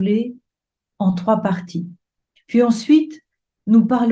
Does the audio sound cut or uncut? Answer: cut